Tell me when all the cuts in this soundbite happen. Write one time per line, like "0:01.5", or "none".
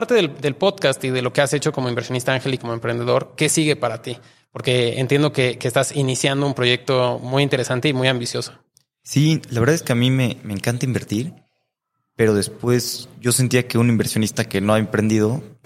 none